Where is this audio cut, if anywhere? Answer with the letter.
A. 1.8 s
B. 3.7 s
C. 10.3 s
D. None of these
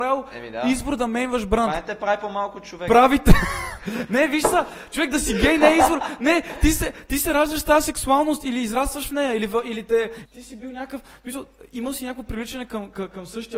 C